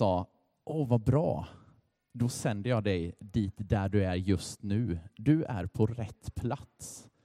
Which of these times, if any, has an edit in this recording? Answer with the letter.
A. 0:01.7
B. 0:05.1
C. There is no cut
C